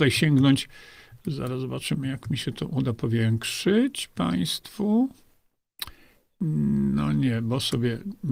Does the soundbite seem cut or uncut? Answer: uncut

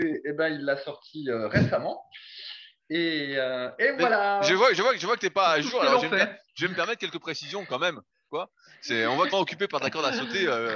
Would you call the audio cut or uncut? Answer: cut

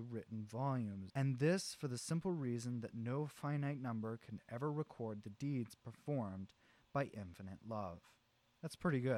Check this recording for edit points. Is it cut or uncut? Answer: cut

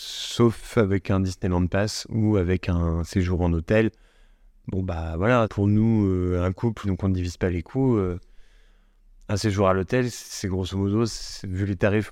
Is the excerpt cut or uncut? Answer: cut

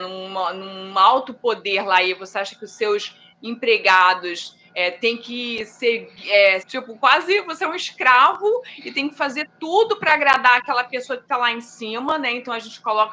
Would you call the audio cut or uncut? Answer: cut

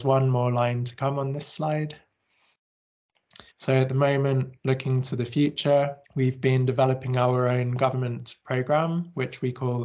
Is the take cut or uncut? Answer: cut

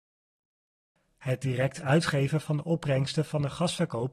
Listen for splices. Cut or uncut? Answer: uncut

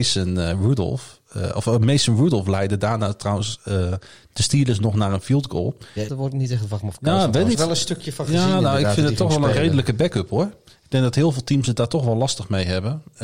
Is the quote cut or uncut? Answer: cut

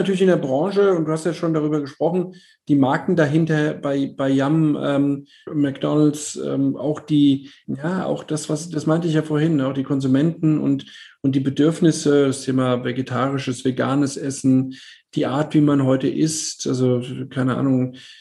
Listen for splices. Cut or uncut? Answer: uncut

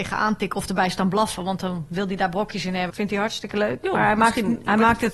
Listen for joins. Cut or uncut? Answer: cut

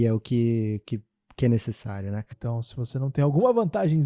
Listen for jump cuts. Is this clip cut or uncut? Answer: cut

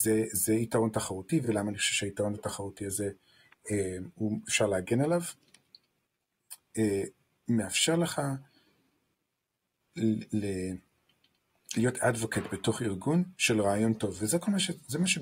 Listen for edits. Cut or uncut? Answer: uncut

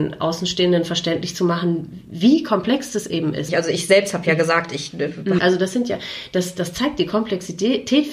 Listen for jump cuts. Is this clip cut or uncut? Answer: cut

